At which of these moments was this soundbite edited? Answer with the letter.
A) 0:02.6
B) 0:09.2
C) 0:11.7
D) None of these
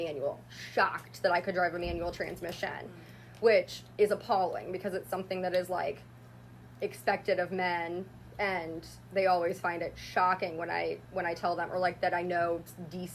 D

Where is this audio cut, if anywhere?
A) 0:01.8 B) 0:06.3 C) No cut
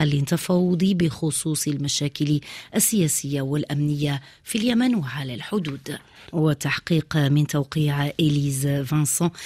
B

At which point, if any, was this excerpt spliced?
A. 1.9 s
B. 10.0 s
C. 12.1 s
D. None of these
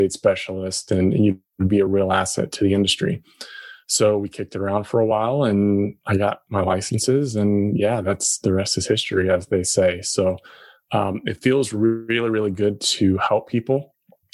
A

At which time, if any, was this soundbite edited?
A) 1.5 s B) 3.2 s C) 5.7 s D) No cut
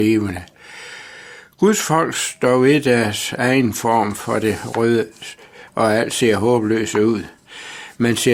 C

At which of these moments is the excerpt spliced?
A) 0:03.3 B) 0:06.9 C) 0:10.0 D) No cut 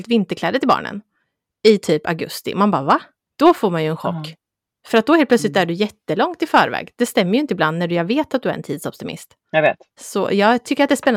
C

